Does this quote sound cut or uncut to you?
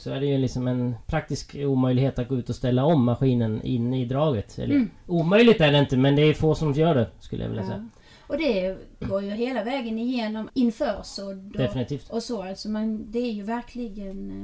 cut